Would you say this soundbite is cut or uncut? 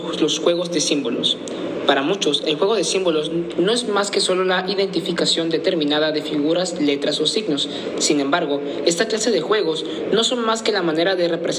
uncut